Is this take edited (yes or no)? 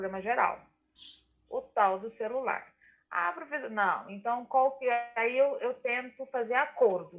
no